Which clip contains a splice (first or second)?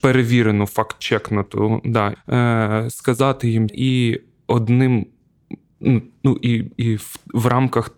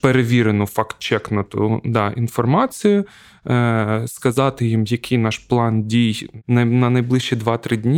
first